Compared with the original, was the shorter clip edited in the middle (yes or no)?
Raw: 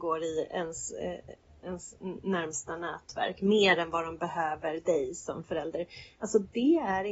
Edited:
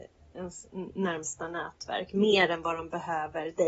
no